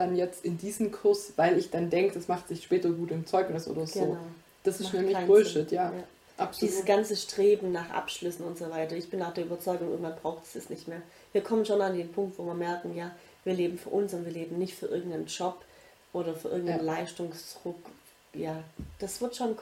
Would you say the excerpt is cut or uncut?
uncut